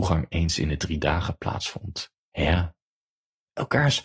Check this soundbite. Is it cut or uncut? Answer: cut